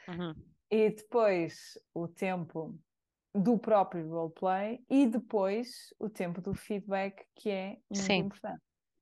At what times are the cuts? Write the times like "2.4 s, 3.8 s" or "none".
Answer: none